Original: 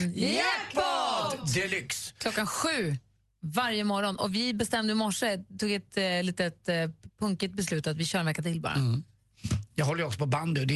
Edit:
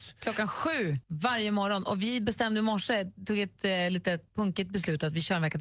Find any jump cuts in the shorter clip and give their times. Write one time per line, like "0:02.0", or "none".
0:01.0
0:04.3